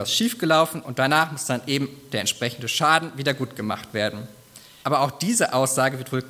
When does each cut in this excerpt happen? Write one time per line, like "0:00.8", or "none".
0:04.8

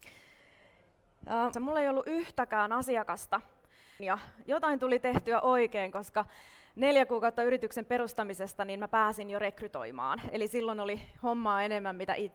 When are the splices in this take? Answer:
0:01.5
0:04.0

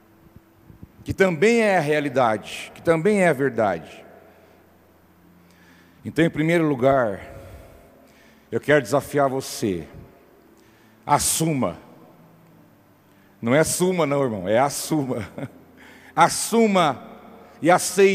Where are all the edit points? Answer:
none

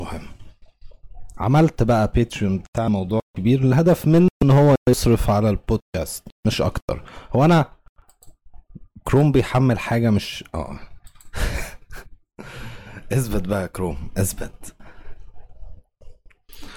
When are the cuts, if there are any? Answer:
0:12.0

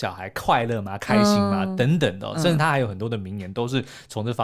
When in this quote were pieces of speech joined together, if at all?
none

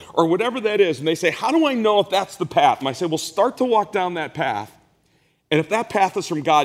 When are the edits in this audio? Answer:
0:02.8

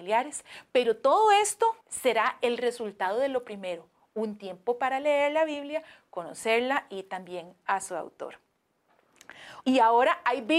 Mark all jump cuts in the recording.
0:01.8
0:09.6

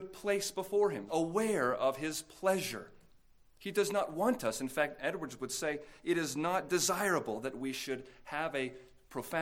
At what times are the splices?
0:01.1

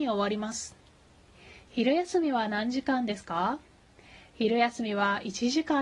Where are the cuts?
none

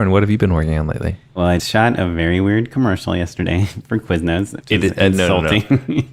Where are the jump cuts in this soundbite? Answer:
0:01.6
0:04.6

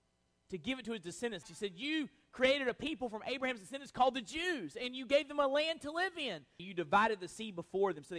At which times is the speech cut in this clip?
0:01.4
0:06.6

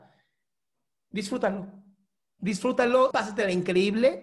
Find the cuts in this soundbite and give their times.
0:03.1

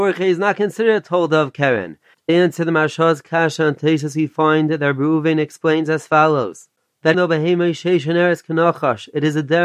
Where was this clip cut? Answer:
0:02.1
0:07.1

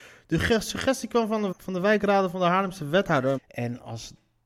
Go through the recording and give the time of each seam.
0:01.5
0:03.4

